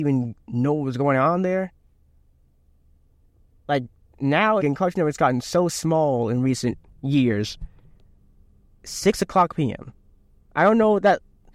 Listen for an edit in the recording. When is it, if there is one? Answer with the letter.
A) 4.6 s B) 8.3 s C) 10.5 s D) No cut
A